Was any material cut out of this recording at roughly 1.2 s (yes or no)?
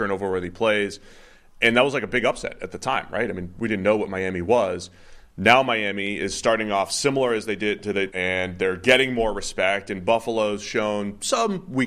no